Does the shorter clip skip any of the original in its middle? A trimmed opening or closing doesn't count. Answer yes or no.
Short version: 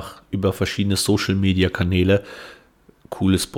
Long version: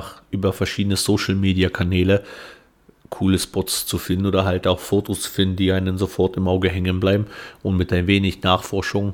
no